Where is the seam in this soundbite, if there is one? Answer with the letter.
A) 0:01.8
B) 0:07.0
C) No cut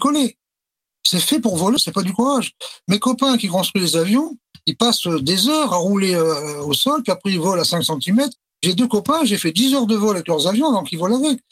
A